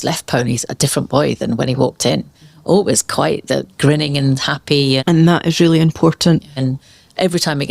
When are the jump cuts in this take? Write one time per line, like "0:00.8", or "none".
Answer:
0:05.0
0:06.6